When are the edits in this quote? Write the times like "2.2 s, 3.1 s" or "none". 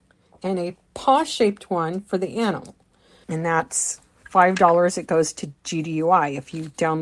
3.2 s